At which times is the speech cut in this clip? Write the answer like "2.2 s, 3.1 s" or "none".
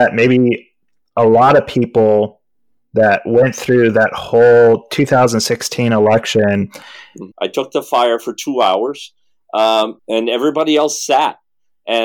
7.3 s, 10.0 s

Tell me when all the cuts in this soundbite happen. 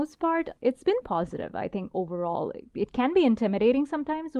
1.0 s

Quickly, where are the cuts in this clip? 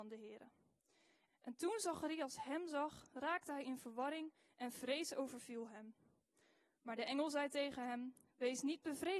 1.3 s

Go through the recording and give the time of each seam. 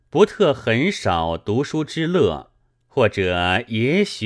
2.7 s

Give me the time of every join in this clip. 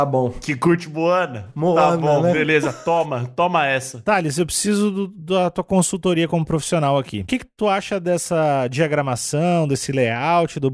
none

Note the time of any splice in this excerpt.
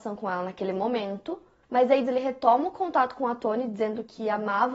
2.1 s

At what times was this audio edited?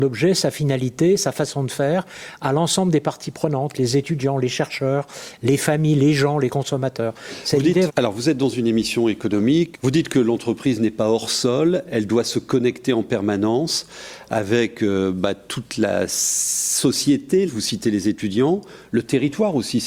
7.9 s, 9.7 s, 17.5 s

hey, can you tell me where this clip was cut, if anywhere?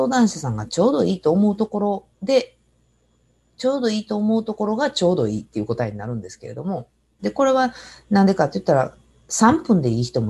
2.1 s, 7.2 s

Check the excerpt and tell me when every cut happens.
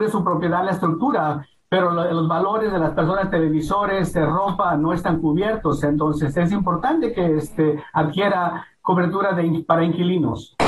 none

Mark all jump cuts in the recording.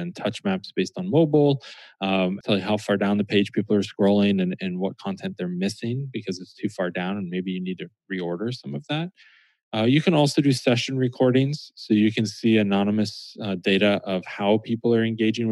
2.4 s

